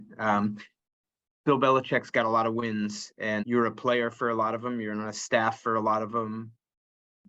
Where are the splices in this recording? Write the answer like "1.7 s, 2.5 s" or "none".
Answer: 3.4 s

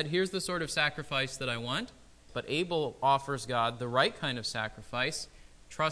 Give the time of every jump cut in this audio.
2.3 s

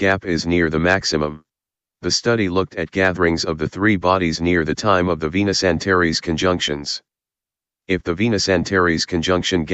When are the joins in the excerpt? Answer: 1.9 s

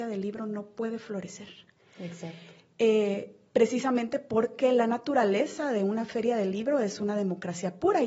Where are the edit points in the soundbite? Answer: none

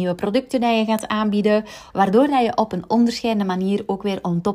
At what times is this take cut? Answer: 1.9 s

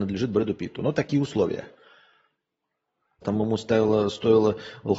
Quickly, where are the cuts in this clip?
3.2 s

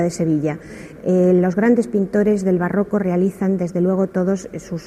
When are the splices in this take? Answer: 1.0 s

